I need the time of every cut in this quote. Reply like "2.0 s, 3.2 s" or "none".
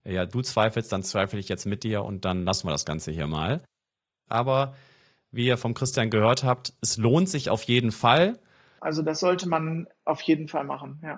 4.3 s, 8.8 s